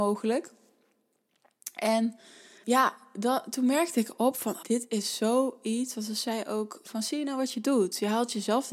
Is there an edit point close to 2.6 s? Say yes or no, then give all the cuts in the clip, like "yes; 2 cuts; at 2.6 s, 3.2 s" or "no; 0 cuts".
yes; 2 cuts; at 2.6 s, 4.6 s